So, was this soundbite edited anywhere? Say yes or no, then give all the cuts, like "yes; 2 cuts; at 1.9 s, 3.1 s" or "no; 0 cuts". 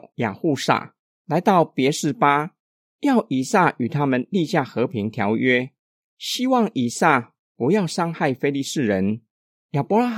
no; 0 cuts